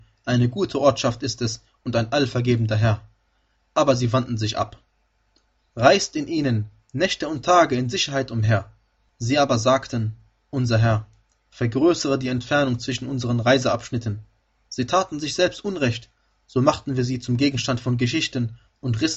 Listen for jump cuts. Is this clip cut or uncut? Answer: cut